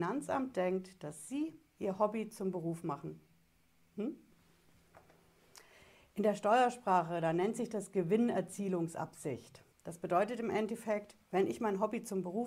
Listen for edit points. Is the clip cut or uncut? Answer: cut